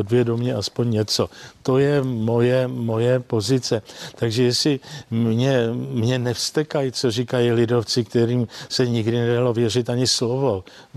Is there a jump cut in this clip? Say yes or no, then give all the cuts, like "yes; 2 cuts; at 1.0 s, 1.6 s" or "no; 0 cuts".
no; 0 cuts